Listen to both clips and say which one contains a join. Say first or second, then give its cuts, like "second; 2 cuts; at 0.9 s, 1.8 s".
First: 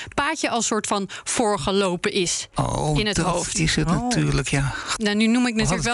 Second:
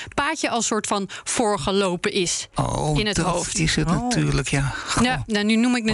first; 1 cut; at 5.0 s